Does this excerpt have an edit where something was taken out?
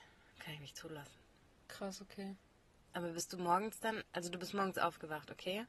no; 0 cuts

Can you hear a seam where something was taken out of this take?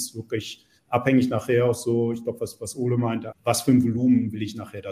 yes; 1 cut; at 3.3 s

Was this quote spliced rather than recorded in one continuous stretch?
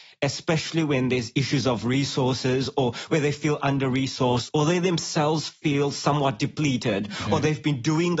no; 0 cuts

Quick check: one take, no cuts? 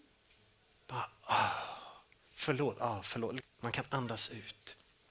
no; 1 cut; at 3.4 s

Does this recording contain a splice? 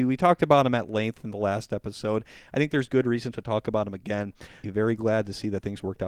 yes; 1 cut; at 4.6 s

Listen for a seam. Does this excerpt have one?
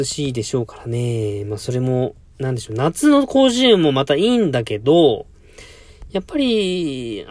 no; 0 cuts

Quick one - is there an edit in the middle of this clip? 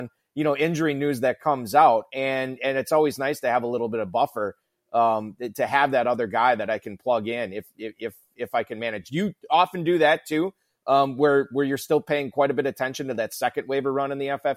no; 0 cuts

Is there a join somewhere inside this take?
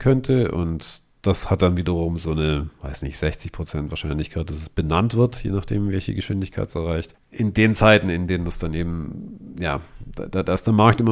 no; 0 cuts

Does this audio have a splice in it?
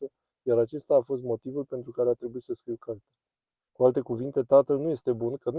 yes; 1 cut; at 3.7 s

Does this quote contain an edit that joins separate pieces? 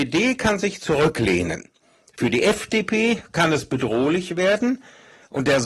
no; 0 cuts

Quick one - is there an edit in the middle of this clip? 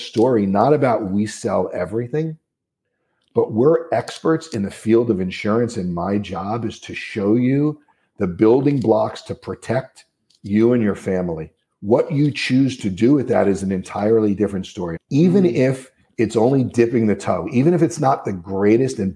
yes; 1 cut; at 15.0 s

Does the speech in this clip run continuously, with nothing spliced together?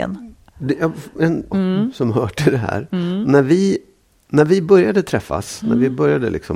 no; 1 cut; at 1.5 s

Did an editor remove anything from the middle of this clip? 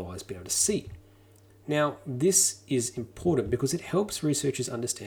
no; 0 cuts

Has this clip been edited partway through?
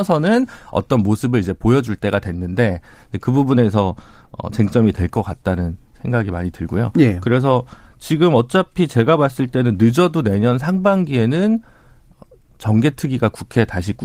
no; 0 cuts

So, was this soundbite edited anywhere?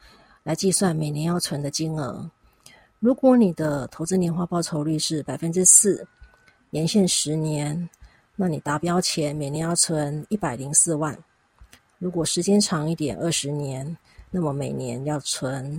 no; 0 cuts

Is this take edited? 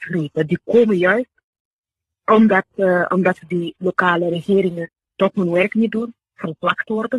no; 0 cuts

